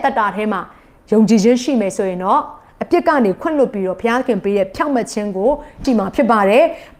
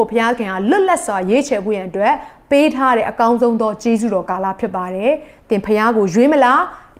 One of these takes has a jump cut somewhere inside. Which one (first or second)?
first